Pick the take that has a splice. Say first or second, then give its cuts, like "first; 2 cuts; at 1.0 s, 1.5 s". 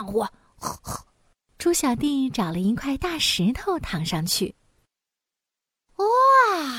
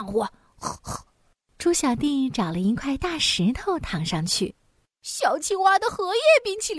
second; 1 cut; at 4.9 s